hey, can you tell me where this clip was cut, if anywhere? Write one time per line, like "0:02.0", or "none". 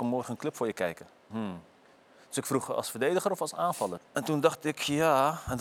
0:01.3
0:04.0